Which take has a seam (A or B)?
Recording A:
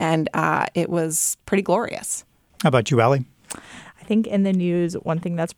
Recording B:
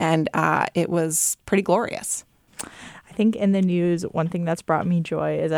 B